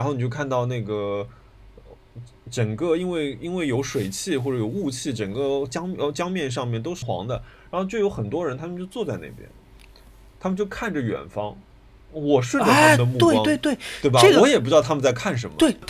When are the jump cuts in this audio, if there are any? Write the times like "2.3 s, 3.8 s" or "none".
7.0 s